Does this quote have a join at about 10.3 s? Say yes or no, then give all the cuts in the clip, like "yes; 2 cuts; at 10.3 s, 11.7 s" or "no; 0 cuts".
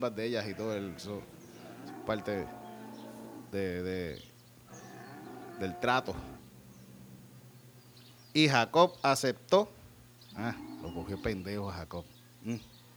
yes; 1 cut; at 10.3 s